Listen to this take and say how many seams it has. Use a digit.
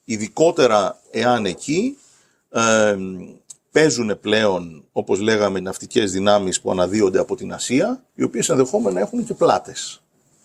2